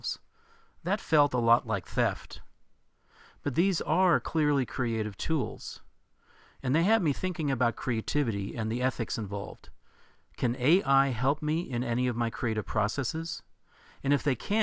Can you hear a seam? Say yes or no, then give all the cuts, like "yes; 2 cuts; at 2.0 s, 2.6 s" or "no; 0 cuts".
no; 0 cuts